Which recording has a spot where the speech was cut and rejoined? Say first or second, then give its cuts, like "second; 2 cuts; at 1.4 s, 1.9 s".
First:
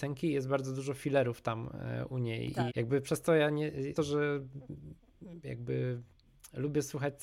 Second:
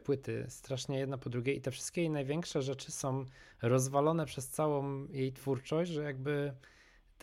first; 2 cuts; at 2.7 s, 4.0 s